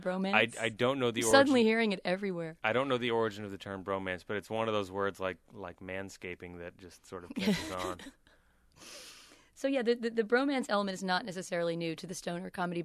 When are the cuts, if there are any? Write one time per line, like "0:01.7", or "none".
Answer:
none